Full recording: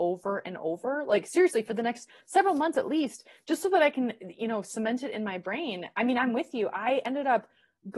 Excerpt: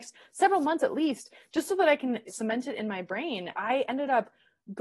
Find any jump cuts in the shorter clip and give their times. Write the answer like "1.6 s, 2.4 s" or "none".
2.3 s, 3.5 s